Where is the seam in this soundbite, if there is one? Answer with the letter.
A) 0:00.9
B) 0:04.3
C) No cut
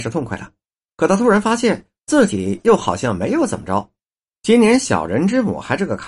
B